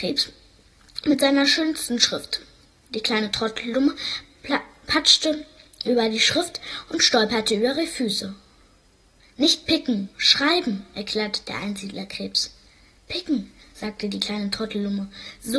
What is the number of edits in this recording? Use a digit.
0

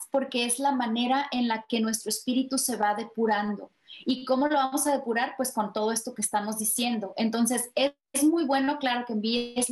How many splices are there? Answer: 0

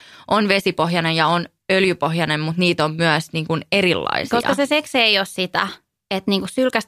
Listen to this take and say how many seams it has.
0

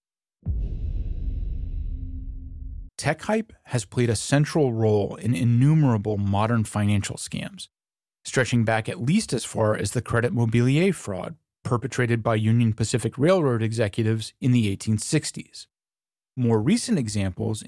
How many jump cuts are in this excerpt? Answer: 1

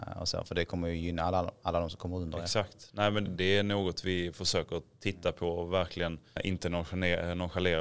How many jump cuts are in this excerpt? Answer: 2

